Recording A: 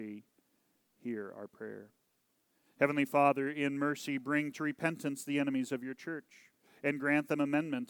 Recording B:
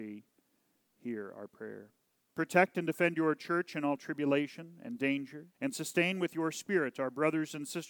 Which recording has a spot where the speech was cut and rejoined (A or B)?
B